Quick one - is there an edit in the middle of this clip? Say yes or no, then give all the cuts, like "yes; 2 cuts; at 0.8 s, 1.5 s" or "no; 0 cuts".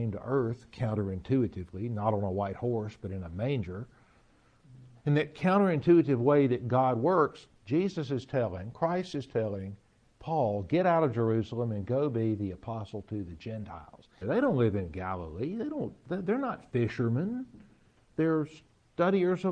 yes; 1 cut; at 14.2 s